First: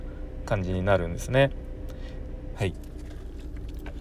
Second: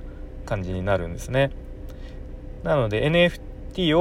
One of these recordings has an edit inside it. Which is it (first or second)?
first